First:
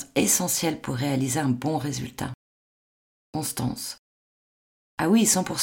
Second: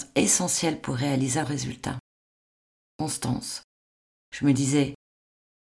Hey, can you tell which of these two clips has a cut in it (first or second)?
second